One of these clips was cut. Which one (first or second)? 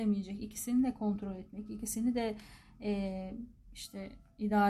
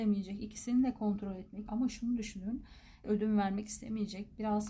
second